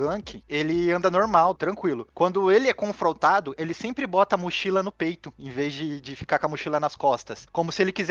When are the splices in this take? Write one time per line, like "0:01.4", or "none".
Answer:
0:01.6